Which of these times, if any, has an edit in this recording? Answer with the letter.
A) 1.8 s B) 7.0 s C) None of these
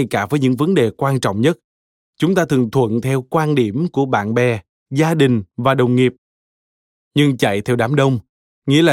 B